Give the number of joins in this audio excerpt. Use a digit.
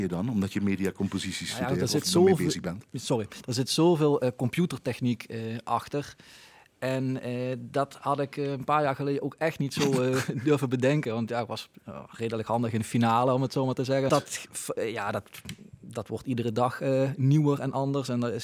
1